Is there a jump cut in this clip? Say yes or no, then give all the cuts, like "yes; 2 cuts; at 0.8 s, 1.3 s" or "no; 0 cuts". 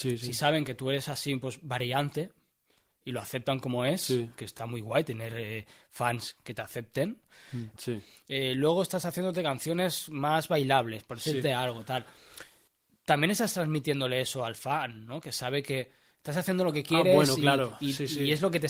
yes; 2 cuts; at 4.6 s, 7.8 s